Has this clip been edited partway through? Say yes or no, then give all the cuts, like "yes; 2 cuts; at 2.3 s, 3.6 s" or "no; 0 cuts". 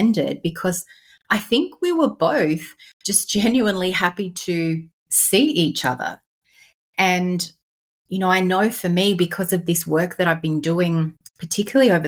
no; 0 cuts